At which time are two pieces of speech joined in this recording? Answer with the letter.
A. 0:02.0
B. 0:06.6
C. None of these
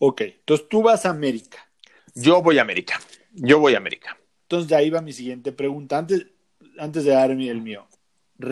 C